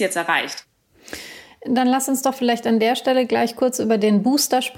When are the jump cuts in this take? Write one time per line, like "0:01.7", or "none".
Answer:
none